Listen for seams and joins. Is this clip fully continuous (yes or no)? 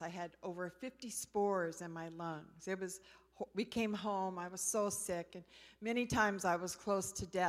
yes